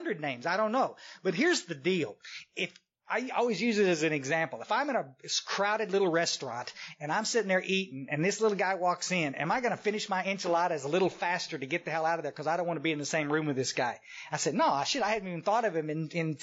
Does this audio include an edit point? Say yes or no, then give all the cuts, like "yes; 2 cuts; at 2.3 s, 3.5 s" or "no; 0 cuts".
no; 0 cuts